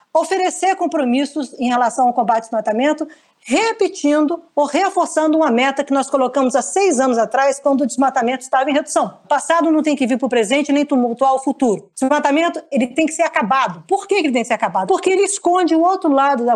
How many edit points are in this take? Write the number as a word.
two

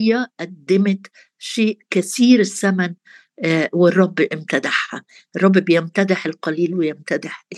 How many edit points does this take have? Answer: zero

